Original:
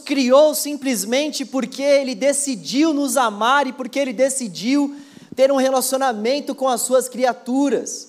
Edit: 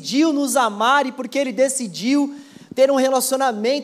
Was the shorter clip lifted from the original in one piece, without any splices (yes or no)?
yes